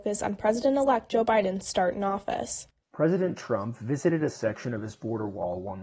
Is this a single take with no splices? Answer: no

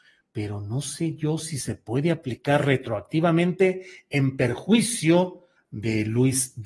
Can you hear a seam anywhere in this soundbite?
yes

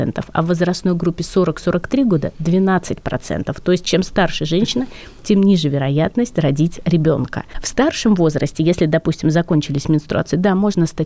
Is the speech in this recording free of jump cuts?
yes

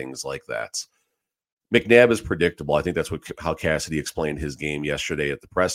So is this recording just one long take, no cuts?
yes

